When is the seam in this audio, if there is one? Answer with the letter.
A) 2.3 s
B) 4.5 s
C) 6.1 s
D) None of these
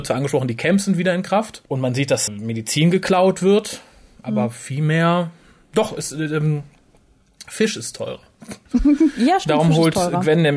A